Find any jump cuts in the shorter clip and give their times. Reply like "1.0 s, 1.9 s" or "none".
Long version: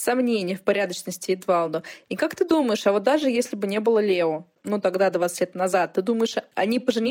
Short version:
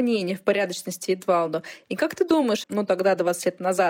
2.6 s